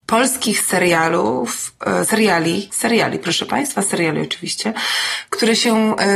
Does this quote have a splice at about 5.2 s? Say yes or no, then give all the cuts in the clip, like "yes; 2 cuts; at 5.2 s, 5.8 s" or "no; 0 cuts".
no; 1 cut; at 2.7 s